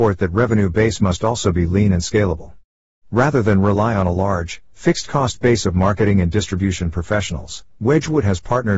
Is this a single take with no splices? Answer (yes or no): yes